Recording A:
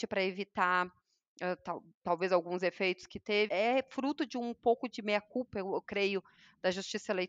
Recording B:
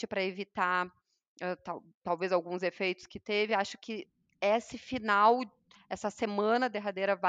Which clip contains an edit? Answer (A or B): A